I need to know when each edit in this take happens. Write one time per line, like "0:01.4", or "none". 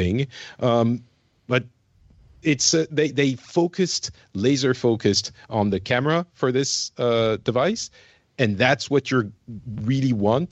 none